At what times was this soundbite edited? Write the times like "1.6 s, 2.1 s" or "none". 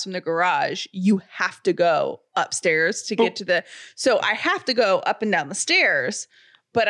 none